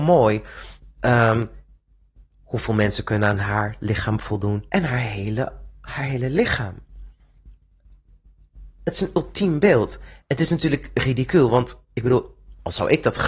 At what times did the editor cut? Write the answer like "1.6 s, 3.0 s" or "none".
4.7 s

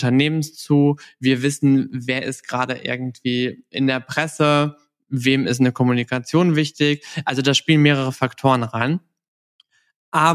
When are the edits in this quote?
none

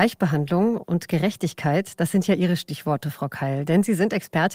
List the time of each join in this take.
none

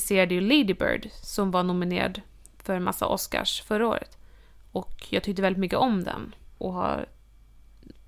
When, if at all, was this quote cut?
6.5 s

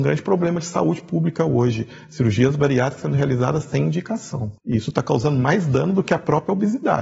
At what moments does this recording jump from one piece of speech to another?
4.6 s

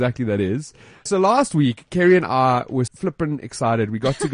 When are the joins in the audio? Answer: 1.1 s, 2.9 s

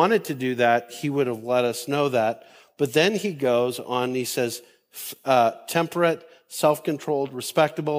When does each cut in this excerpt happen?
none

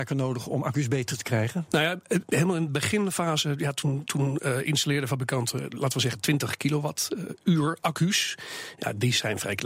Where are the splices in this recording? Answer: 1.7 s

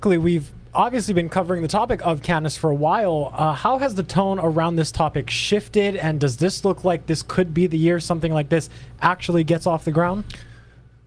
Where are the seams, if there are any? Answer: none

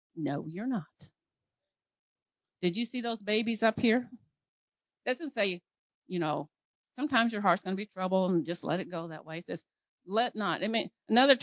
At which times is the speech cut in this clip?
4.8 s

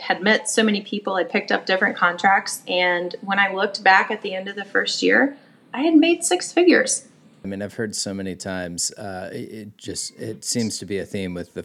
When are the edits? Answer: 7.4 s

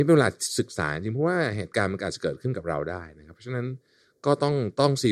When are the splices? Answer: none

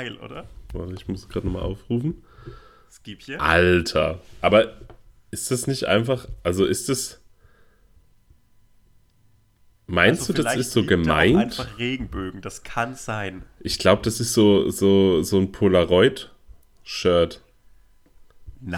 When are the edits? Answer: none

